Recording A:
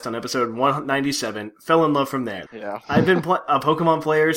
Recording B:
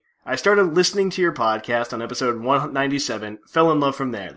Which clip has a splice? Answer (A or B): A